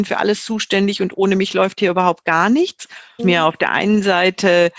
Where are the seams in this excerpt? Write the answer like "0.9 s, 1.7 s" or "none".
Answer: 3.2 s

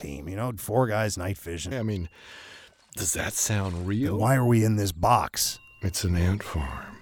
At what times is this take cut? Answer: 1.7 s

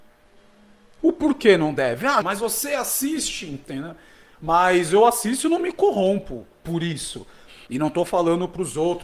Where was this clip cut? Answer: 1.0 s, 2.2 s, 7.7 s

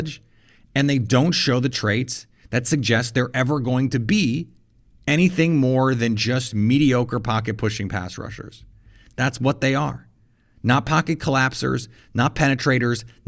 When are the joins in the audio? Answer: none

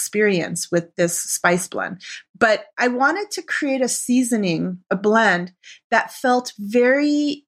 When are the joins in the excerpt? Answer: none

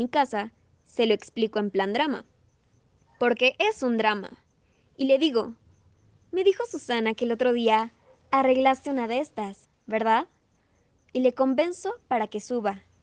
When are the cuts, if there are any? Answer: none

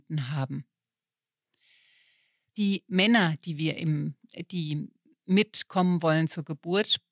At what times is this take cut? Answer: 2.5 s

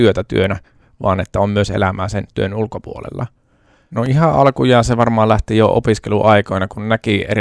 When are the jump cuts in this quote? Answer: 3.9 s

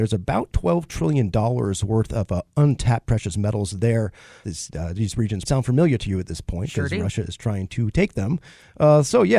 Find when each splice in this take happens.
4.4 s, 5.4 s

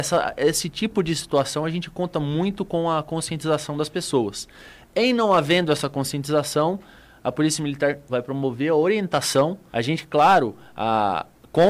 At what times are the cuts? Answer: 8.1 s, 9.7 s

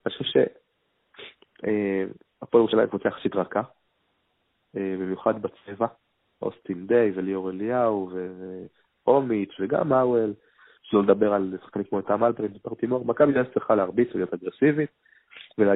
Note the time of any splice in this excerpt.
none

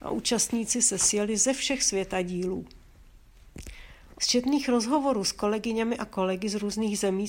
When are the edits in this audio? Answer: 4.2 s

